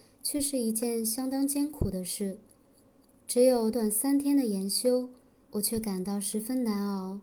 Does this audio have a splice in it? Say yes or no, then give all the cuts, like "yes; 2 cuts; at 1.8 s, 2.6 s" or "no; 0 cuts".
yes; 2 cuts; at 3.7 s, 5.4 s